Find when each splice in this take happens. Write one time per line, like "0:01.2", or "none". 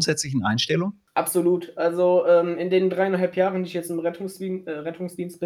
0:01.1